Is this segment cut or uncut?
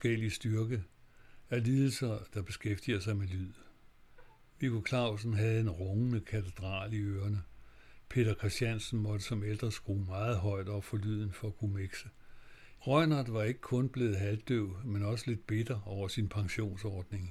cut